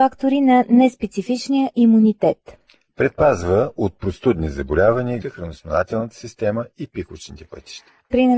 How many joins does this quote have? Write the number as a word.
one